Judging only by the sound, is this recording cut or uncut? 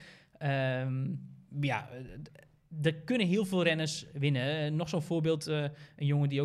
uncut